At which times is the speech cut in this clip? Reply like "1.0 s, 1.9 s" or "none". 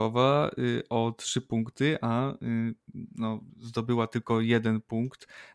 3.5 s